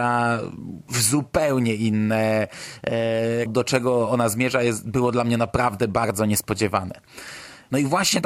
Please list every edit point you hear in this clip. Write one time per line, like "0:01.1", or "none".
0:03.5

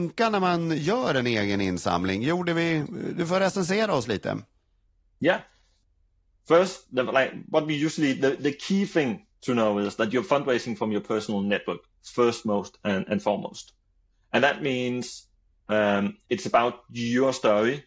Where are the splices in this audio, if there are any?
none

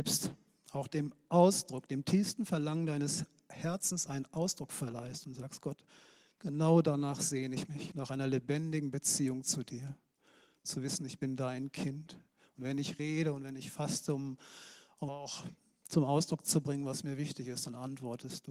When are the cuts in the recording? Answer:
0:15.1

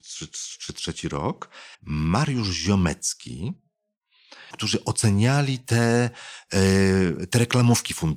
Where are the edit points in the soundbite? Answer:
0:01.7
0:04.5

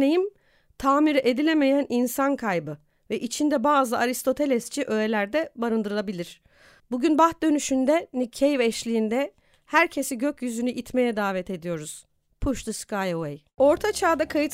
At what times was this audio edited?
0:06.8

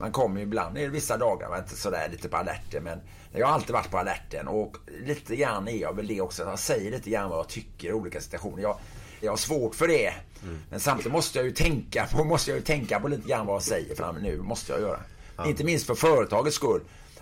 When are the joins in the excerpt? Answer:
0:09.2

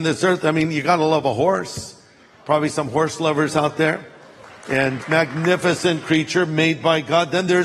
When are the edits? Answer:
0:05.0

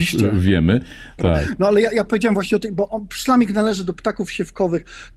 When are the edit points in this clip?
0:01.2

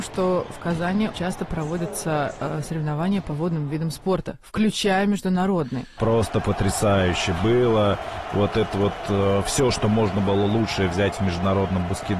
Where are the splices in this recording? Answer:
0:01.1
0:06.0

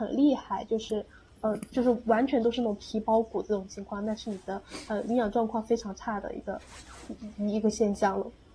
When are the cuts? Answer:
none

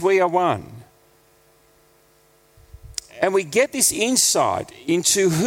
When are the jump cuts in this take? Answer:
0:03.1

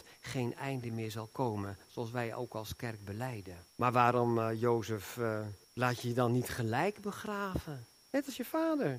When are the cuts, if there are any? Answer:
0:03.7
0:05.6

